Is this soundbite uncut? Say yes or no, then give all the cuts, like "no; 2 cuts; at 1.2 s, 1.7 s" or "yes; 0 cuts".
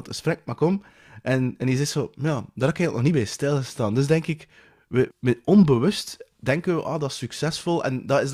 no; 1 cut; at 5.1 s